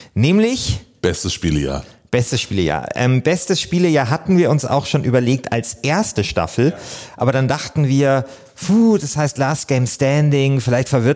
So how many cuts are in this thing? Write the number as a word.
zero